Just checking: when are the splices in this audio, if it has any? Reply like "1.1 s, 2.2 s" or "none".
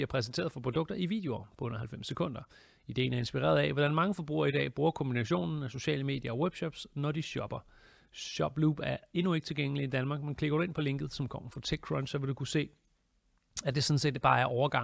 none